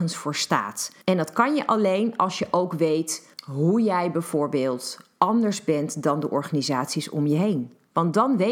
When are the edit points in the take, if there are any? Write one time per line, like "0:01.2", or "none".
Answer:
0:01.0
0:03.3